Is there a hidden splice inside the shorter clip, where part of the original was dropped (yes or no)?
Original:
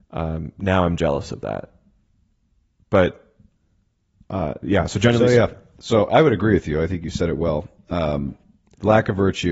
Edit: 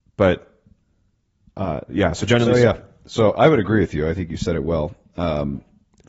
no